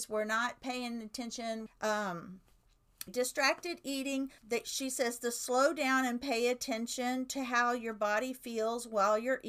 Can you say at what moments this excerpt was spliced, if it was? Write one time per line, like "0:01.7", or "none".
0:01.7
0:03.1
0:04.4